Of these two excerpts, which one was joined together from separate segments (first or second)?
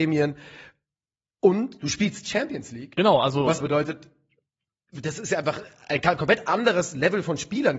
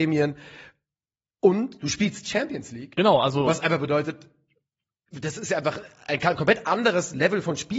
first